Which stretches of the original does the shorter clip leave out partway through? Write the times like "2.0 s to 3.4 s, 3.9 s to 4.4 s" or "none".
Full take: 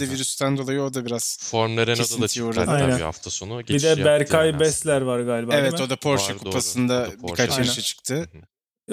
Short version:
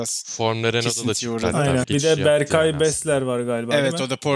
3.0 s to 3.6 s